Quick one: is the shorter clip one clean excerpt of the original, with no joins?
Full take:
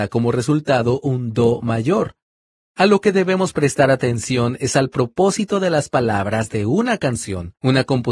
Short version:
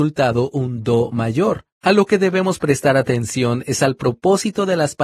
no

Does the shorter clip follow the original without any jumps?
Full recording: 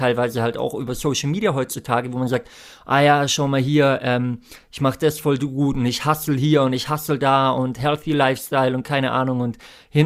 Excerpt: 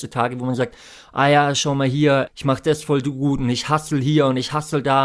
no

